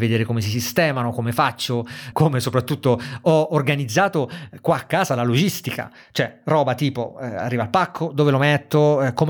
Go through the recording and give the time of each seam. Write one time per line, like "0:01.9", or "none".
0:02.1

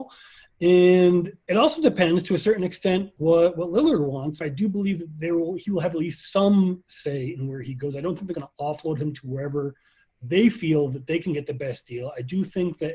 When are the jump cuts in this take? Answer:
0:04.4
0:08.3

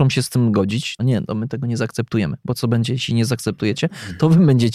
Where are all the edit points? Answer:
0:01.0

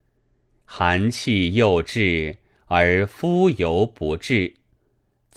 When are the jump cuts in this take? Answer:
none

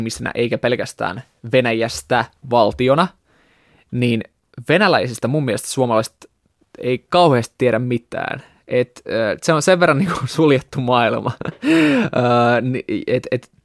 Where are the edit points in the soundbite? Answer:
none

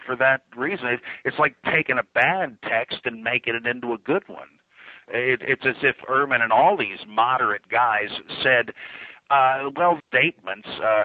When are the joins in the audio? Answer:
0:10.0

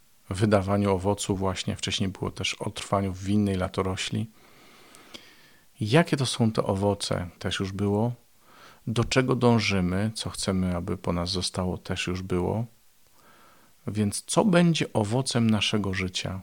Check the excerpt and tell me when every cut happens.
0:07.4

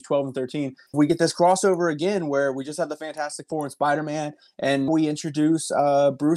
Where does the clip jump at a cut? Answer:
0:00.9
0:04.9

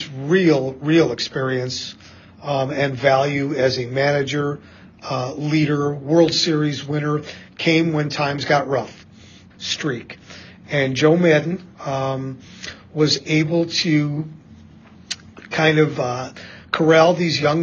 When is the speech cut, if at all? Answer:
0:09.5
0:11.7

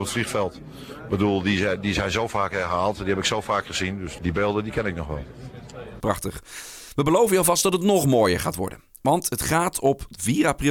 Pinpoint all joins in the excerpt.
0:04.2
0:06.0

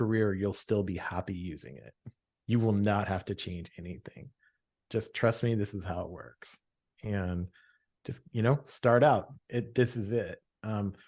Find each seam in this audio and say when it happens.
0:09.4

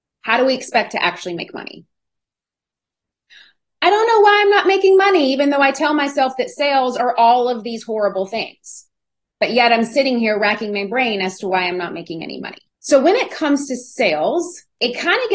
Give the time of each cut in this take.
none

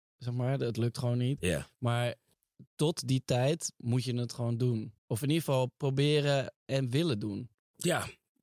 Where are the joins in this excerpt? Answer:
0:01.4
0:05.0

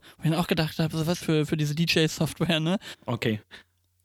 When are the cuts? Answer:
0:01.2
0:02.9

